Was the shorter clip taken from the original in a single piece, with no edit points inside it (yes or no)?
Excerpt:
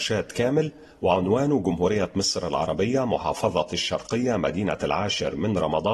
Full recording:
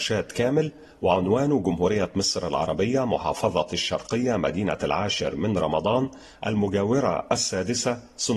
yes